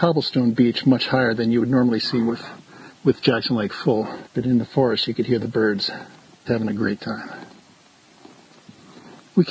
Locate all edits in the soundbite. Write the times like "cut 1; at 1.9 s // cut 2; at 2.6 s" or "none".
cut 1; at 4.3 s // cut 2; at 6.5 s

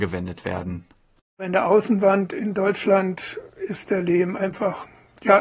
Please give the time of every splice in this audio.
none

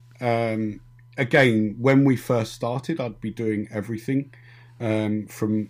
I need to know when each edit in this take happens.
none

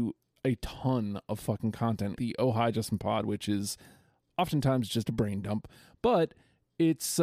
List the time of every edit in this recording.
cut 1; at 2.2 s

